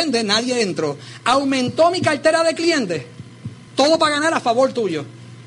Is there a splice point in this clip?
yes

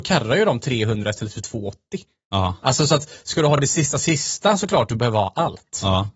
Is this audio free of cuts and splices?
yes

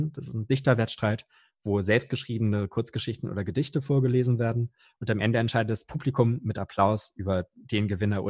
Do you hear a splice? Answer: no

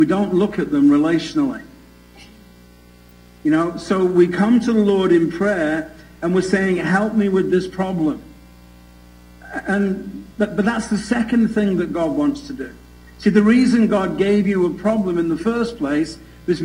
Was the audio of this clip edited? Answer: no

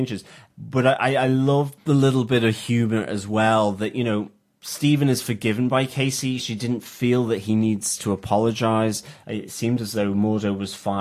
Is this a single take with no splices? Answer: no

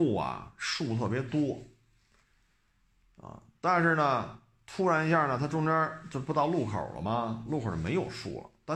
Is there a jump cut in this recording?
no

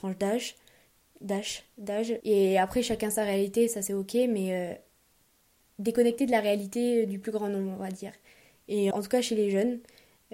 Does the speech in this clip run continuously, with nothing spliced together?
no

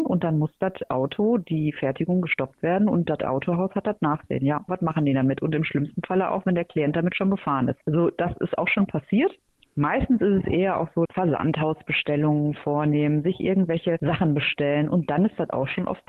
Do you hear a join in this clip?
yes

